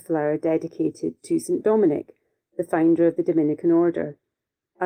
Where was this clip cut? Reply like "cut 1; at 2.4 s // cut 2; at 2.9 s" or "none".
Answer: none